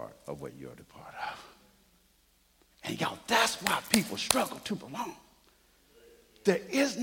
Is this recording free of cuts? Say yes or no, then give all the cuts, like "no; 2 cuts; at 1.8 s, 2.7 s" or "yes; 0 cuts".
yes; 0 cuts